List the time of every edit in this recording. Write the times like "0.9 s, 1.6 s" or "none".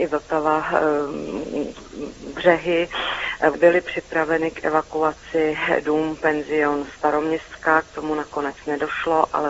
3.5 s